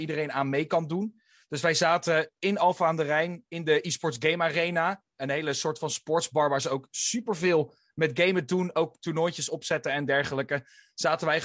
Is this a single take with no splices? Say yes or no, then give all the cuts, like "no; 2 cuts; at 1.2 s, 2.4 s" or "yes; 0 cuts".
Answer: yes; 0 cuts